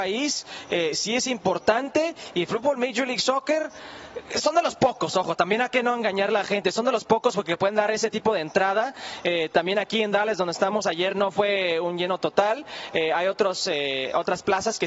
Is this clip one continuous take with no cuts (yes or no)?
yes